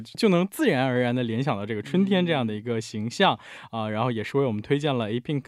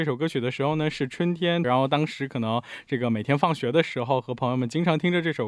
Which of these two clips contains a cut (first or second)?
second